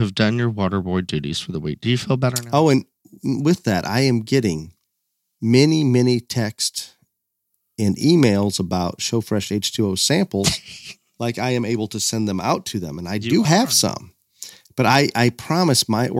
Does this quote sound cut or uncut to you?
uncut